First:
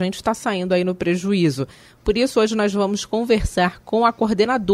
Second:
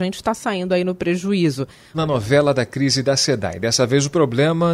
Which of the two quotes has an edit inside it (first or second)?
second